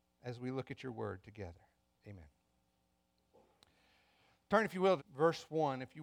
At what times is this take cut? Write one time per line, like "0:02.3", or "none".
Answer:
0:02.0
0:05.0